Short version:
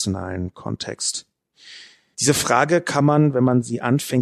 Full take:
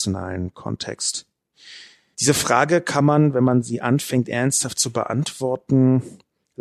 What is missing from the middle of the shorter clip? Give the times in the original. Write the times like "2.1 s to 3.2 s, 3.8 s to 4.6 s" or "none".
none